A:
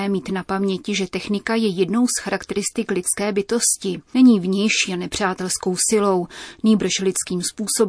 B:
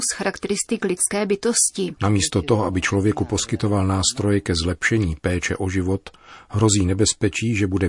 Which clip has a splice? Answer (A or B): B